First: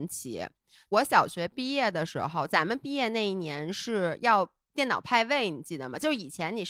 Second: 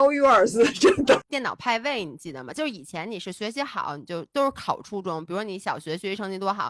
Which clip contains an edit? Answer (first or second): second